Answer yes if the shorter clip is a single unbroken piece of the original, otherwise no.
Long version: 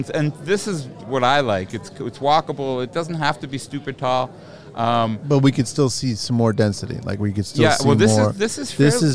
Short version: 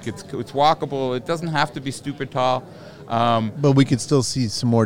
yes